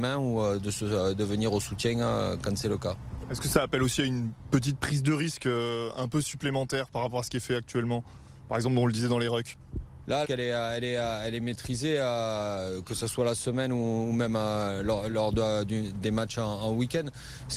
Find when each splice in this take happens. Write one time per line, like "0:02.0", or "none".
0:10.2

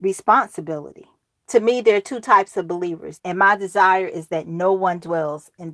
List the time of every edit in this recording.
0:01.4
0:03.2

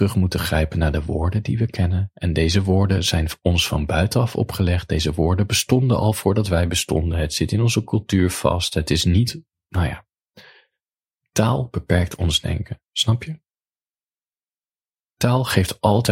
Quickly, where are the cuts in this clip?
none

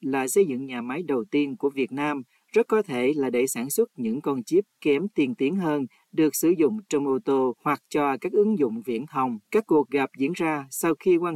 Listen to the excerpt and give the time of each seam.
0:09.4

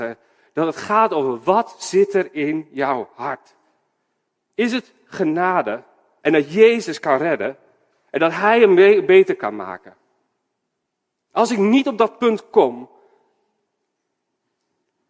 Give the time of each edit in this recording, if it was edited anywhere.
0:06.2

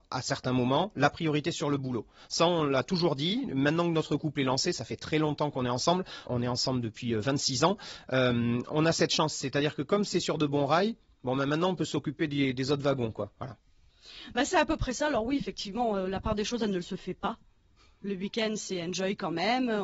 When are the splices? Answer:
0:06.3

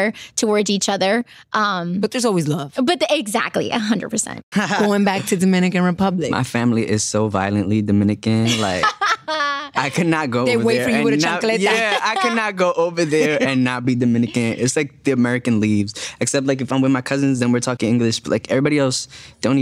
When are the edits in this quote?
0:04.5

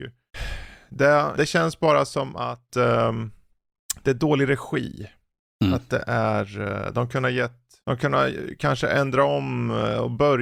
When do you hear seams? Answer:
0:01.3

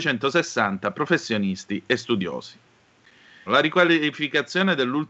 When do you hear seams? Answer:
0:03.5

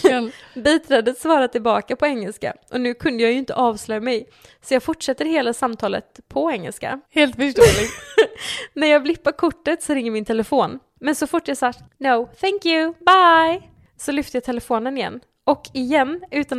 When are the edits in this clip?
0:07.0
0:11.0

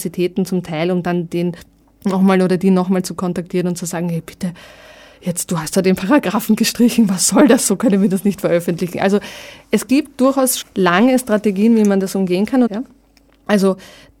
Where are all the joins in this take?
0:10.6
0:12.7

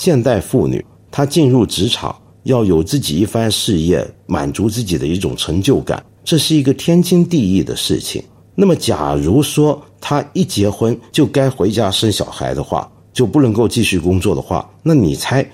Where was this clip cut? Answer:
none

